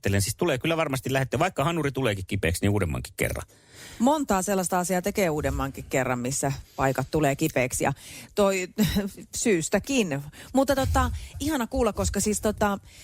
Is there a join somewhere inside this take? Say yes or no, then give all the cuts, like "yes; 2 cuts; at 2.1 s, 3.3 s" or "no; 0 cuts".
yes; 1 cut; at 11.3 s